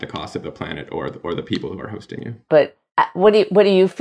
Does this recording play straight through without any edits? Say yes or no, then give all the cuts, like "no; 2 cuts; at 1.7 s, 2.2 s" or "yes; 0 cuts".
no; 1 cut; at 2.5 s